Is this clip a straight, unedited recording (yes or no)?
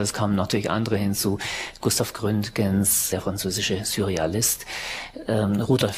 no